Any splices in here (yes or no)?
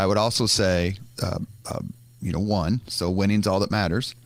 yes